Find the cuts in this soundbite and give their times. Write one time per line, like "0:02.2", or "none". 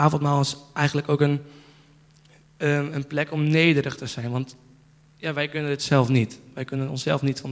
none